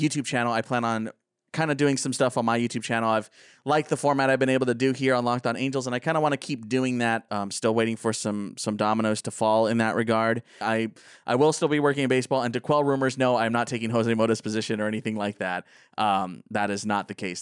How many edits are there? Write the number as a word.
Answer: two